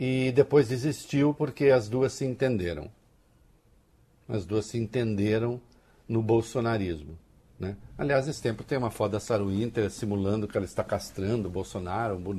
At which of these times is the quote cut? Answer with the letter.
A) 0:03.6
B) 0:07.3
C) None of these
C